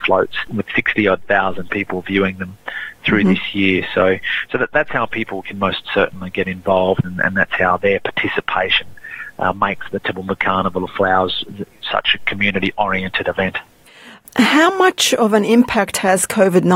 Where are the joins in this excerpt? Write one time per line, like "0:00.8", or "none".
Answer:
0:05.4